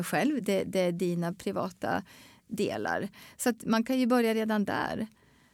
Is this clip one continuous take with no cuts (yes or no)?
yes